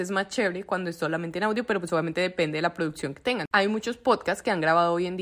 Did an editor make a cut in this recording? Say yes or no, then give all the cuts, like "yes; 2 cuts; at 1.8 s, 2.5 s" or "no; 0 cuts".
no; 0 cuts